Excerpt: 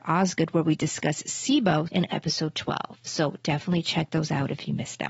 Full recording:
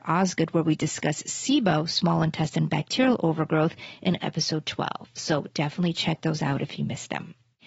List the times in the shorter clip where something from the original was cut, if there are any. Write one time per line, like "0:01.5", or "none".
0:01.9

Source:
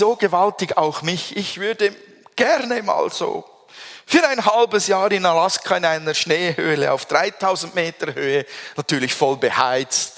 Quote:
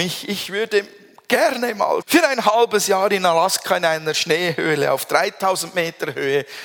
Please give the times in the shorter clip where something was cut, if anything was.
0:02.0

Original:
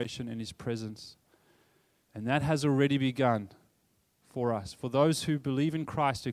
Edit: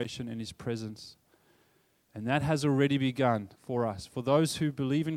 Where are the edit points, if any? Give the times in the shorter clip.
0:03.5

